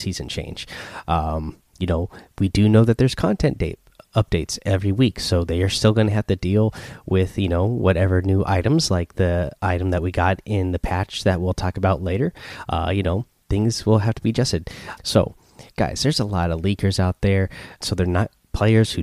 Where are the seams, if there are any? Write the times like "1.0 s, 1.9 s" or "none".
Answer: 15.0 s, 17.8 s